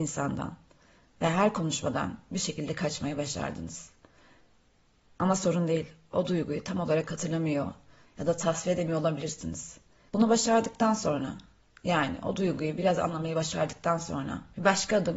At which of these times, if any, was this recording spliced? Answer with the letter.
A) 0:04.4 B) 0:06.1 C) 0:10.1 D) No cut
C